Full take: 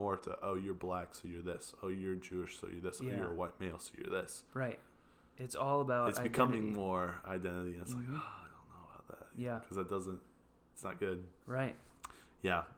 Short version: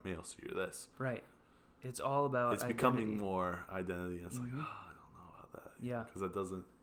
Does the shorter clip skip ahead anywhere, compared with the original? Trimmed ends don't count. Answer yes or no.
no